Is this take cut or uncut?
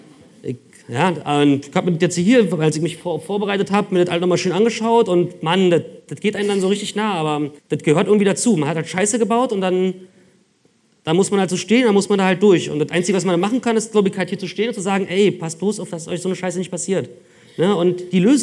cut